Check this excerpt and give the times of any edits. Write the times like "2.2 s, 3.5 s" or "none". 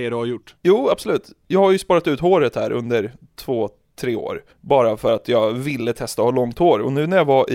4.5 s